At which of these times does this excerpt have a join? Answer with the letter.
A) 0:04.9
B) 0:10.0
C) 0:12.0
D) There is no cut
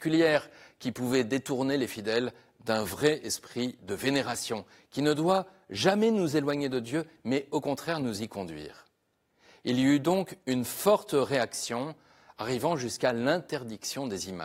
D